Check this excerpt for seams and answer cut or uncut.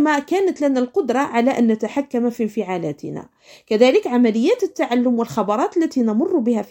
uncut